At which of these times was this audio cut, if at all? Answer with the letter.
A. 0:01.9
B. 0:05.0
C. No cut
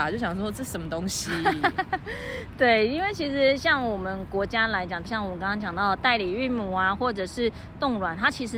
B